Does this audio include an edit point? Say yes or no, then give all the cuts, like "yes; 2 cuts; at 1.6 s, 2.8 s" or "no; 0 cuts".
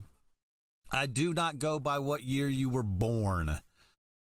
no; 0 cuts